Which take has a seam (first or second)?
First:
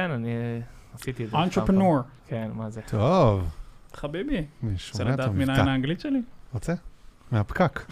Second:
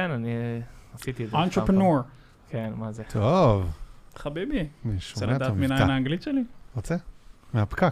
first